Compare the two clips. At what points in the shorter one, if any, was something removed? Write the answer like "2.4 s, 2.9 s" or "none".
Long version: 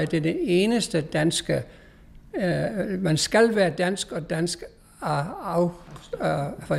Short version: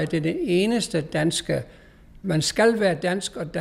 2.2 s